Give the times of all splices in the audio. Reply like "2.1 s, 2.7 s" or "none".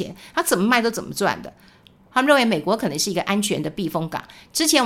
2.1 s